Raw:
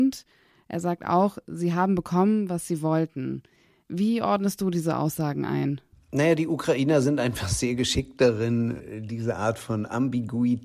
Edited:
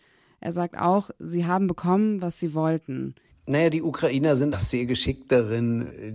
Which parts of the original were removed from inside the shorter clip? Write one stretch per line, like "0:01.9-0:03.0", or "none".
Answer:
0:03.6-0:05.9
0:07.2-0:07.4